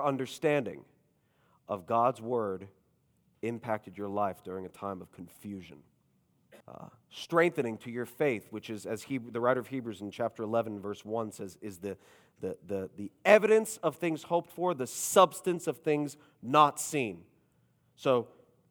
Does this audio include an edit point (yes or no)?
yes